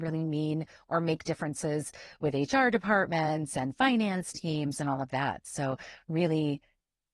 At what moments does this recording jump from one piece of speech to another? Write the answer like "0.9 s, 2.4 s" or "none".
none